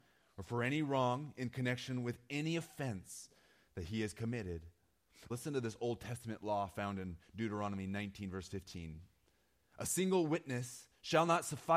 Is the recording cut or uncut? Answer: cut